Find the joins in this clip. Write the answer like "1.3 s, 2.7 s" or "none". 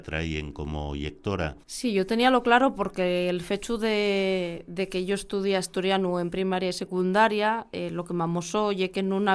1.6 s